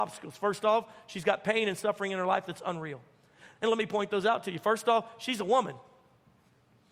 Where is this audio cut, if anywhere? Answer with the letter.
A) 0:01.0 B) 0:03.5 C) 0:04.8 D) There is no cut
B